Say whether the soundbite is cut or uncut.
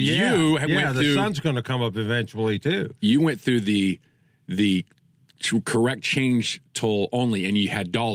uncut